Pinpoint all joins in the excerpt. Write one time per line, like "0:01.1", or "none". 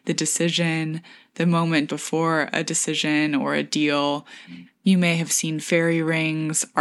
0:01.9
0:04.7